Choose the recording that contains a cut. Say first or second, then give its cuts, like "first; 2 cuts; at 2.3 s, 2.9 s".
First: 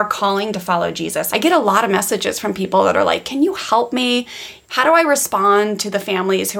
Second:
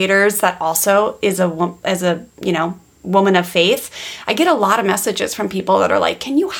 first; 2 cuts; at 1.3 s, 4.6 s